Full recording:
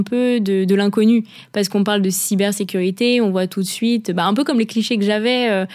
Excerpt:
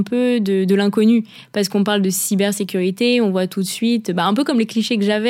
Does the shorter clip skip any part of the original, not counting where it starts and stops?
no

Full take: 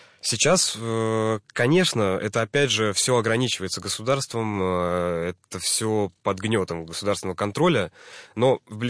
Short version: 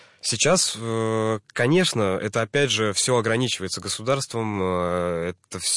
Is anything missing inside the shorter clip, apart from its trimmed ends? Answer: no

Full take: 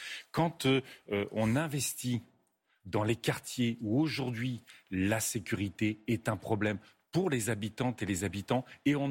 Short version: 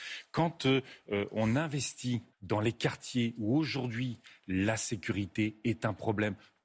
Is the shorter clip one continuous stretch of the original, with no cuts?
no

